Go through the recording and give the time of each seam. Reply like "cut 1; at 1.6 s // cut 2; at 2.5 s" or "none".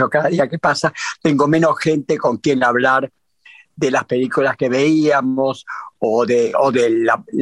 none